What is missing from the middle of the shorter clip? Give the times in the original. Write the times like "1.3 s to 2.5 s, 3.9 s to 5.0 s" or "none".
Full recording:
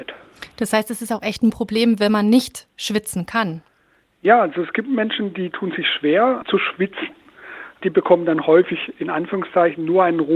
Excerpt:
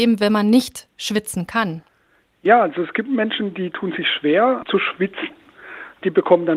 none